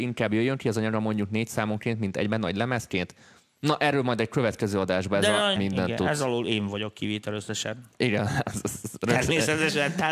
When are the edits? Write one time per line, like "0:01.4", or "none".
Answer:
0:05.6